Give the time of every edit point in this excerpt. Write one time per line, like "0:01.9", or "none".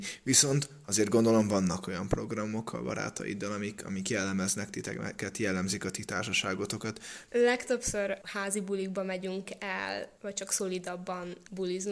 0:07.3

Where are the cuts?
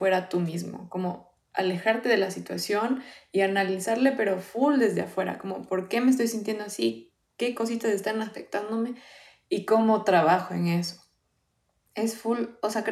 none

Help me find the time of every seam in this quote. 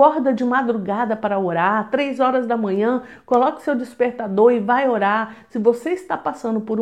none

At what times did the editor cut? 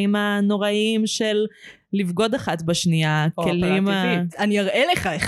0:04.3

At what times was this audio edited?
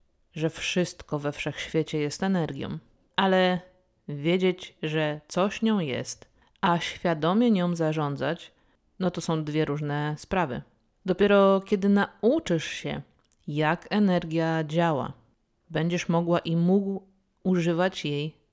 none

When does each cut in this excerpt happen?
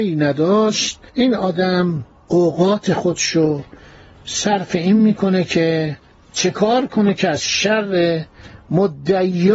0:01.1

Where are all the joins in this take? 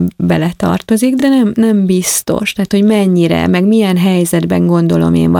none

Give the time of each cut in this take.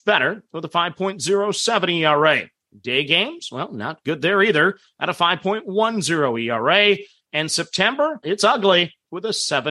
0:08.2

